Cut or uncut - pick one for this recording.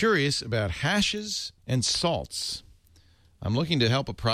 cut